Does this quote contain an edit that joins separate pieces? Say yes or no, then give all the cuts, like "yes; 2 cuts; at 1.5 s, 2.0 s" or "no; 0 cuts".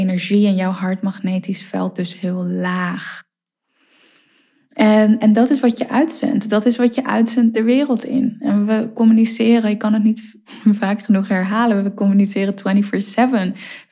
no; 0 cuts